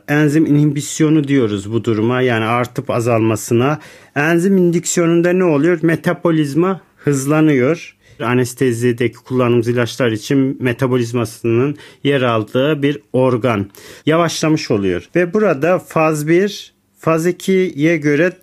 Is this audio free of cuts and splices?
no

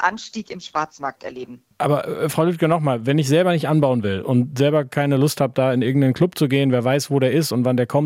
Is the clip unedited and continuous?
yes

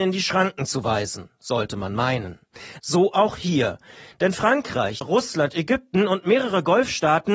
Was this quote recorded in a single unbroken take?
no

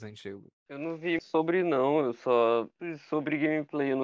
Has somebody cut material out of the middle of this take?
yes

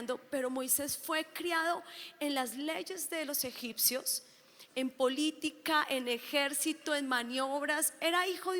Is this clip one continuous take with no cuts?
no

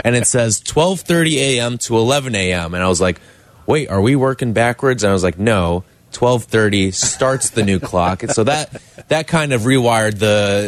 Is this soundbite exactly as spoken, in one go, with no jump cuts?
yes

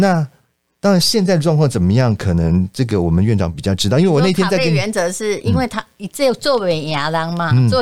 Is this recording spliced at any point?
no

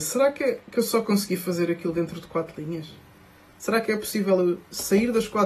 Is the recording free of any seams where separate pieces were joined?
yes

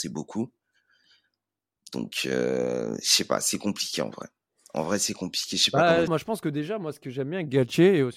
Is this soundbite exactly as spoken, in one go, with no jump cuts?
no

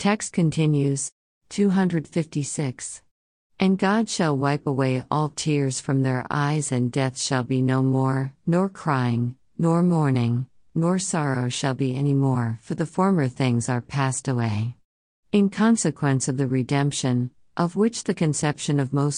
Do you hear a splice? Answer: no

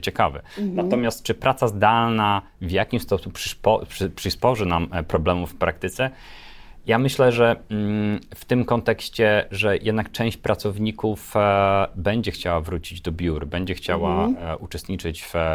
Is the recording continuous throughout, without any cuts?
yes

